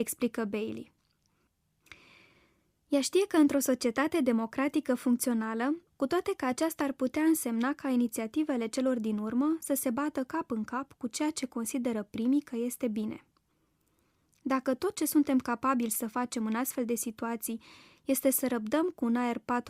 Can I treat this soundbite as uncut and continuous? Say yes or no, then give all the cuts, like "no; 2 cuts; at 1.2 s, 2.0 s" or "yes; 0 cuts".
no; 1 cut; at 5.9 s